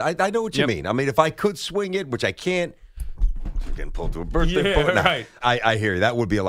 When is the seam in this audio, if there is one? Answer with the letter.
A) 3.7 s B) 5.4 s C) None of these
B